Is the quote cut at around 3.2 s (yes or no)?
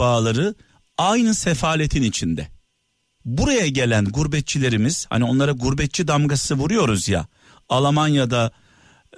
yes